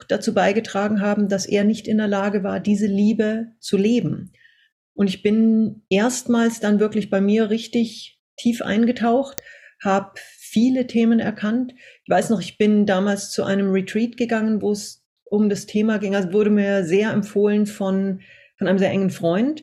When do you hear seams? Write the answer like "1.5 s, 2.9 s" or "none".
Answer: none

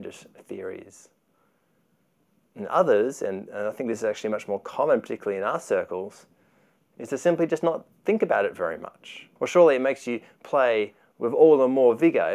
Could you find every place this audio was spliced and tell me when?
9.4 s

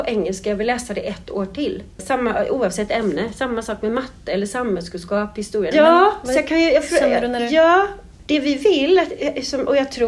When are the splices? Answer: 1.9 s, 5.7 s

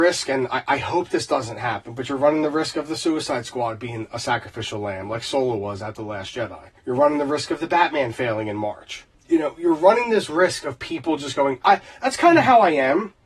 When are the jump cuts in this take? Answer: 6.8 s, 9.1 s, 11.6 s

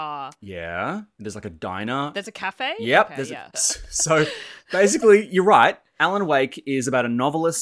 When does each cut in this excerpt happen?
3.5 s

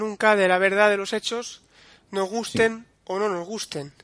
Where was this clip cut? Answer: none

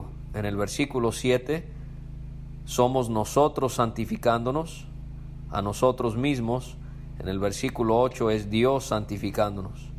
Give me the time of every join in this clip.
none

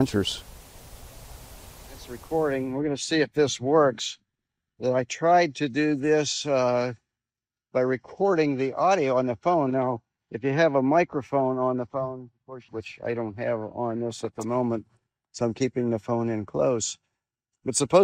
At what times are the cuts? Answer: 12.7 s

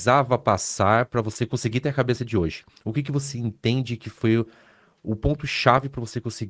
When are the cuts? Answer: none

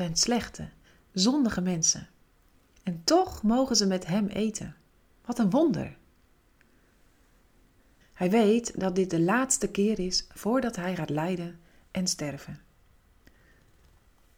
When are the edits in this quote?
8.0 s

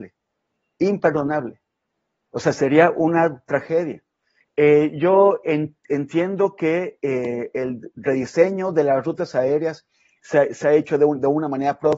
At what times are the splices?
4.4 s

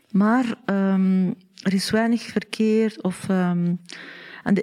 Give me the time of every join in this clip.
none

